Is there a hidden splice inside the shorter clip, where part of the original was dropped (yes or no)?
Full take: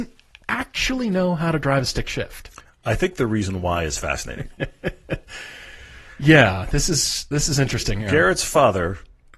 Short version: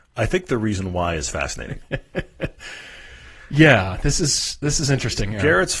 no